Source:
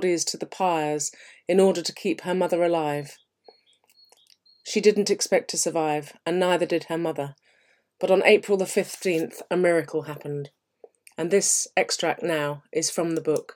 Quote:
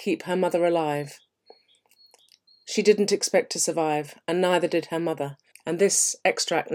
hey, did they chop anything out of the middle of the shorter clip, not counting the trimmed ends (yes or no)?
yes